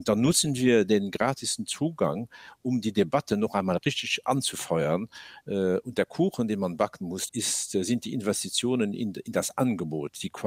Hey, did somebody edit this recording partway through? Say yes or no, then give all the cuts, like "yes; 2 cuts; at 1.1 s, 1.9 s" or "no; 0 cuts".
yes; 2 cuts; at 5.4 s, 7.3 s